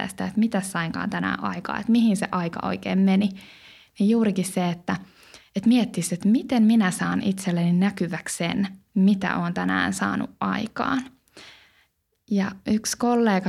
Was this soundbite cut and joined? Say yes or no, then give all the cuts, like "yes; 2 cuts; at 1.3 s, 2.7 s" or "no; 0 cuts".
no; 0 cuts